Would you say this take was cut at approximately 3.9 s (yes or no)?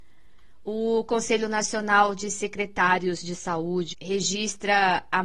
yes